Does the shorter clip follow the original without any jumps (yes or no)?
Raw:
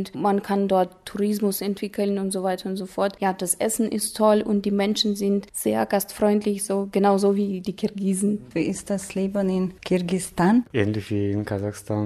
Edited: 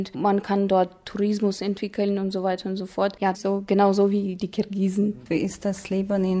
no